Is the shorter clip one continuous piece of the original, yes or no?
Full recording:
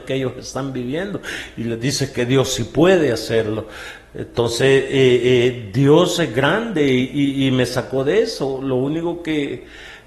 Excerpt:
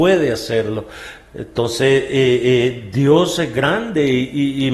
yes